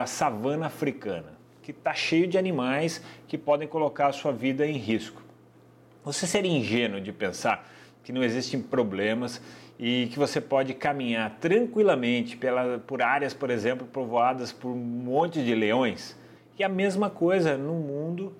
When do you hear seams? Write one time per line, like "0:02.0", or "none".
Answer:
0:16.4